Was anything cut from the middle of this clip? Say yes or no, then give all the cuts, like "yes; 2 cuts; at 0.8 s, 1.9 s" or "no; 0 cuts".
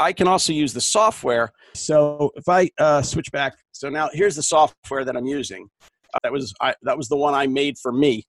yes; 2 cuts; at 1.7 s, 6.2 s